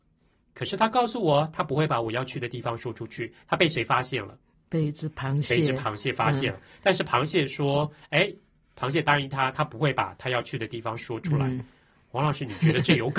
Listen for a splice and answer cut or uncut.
uncut